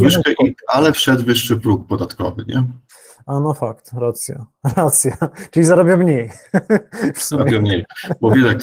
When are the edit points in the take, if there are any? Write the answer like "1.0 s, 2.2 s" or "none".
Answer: none